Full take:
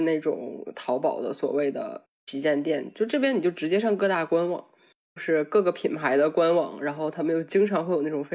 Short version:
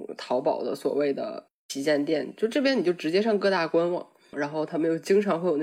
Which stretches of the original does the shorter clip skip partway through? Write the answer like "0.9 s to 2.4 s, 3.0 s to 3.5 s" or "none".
4.9 s to 6.8 s